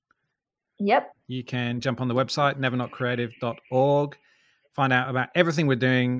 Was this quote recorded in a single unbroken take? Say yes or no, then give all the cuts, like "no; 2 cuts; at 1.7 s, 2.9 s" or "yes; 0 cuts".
no; 1 cut; at 1.1 s